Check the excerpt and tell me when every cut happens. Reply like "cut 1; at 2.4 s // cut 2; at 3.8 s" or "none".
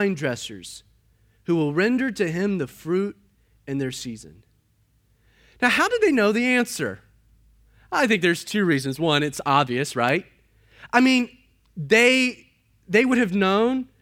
none